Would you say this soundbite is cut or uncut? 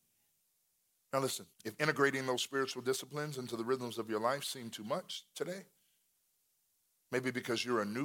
cut